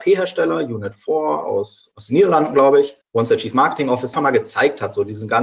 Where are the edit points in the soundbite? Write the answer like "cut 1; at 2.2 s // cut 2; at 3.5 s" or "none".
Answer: cut 1; at 4.1 s